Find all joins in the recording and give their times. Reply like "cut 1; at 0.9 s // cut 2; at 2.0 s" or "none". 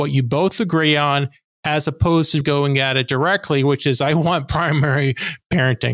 cut 1; at 2.4 s